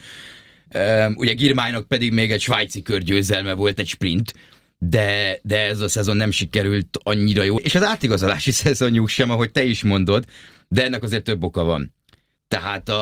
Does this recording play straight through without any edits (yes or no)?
no